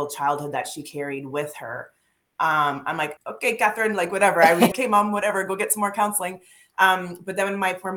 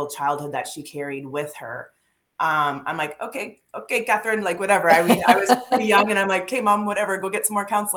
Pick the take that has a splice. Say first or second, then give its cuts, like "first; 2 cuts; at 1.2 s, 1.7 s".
first; 2 cuts; at 3.2 s, 4.7 s